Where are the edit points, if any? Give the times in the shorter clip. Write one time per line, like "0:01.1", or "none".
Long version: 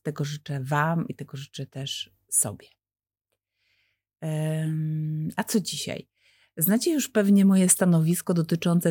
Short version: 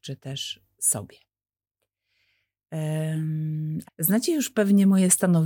0:03.8

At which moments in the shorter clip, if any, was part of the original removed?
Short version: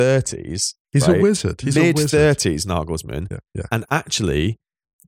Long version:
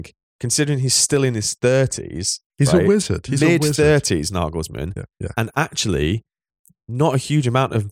none

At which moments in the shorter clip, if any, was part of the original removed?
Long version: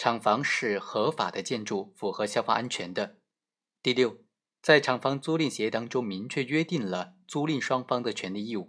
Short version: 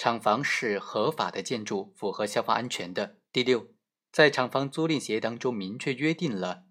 0:03.3

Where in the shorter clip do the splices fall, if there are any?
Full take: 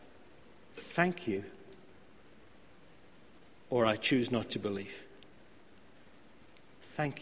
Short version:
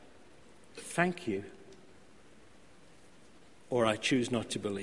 none

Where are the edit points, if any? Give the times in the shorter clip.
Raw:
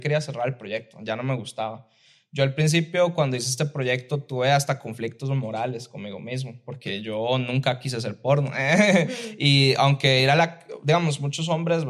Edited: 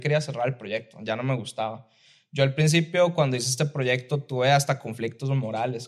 none

